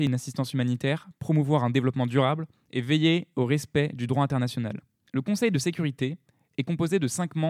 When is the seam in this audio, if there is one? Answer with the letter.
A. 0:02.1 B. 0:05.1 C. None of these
B